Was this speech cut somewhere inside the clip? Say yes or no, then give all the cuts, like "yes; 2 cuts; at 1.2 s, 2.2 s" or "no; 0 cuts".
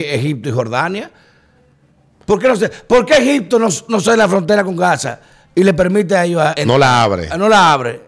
yes; 1 cut; at 6.5 s